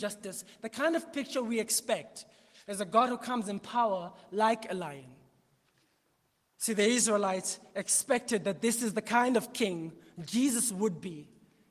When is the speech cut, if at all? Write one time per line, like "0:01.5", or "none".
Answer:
none